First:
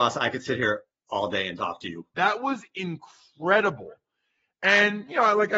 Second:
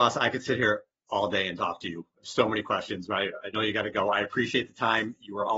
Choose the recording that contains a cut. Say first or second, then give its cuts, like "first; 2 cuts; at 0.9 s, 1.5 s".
first; 1 cut; at 2.1 s